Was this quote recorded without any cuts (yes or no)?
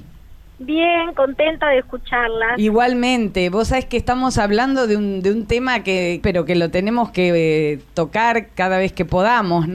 no